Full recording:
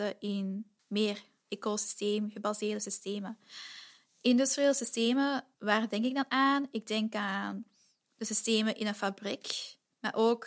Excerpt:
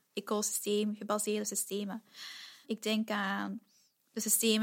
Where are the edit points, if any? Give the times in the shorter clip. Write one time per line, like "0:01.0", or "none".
0:02.6